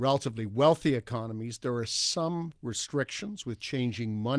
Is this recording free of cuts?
yes; 0 cuts

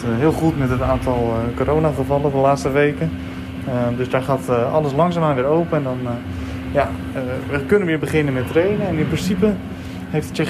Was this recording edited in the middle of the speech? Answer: no; 0 cuts

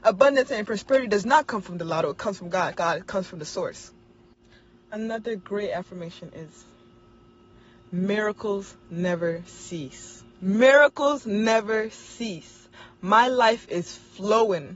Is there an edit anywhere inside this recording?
yes; 1 cut; at 10.3 s

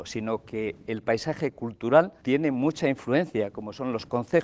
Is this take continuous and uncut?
no; 1 cut; at 2.2 s

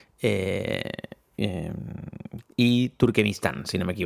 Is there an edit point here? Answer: yes; 1 cut; at 2.5 s

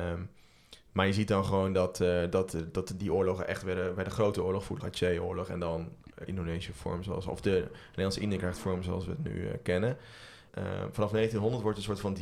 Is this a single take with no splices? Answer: no; 3 cuts; at 4.8 s, 6.3 s, 10.5 s

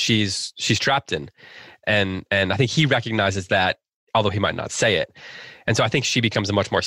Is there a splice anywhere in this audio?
no; 0 cuts

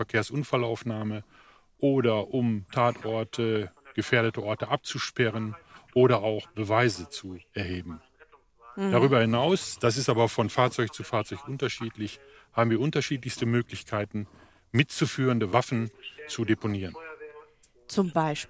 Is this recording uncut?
yes; 0 cuts

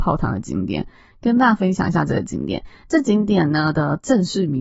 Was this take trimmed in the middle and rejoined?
no; 0 cuts

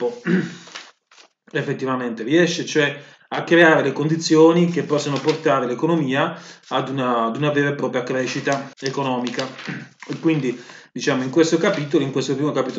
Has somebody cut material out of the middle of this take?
yes; 2 cuts; at 8.7 s, 10.0 s

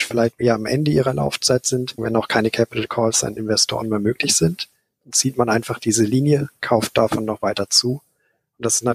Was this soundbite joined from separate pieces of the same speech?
yes; 1 cut; at 2.0 s

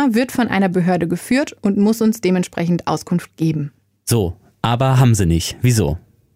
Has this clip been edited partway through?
no; 0 cuts

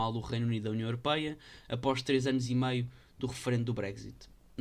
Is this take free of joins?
yes; 0 cuts

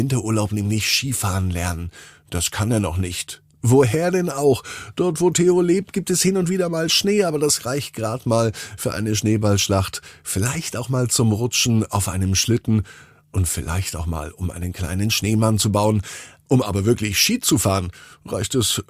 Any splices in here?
no; 0 cuts

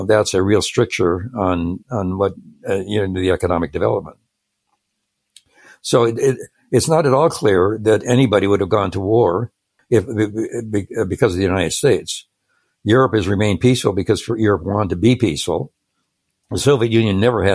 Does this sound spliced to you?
yes; 1 cut; at 1.8 s

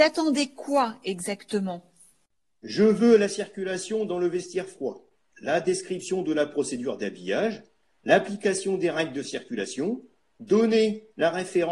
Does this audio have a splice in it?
no; 0 cuts

